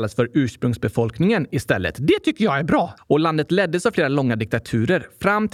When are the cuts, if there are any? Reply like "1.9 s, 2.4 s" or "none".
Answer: 3.0 s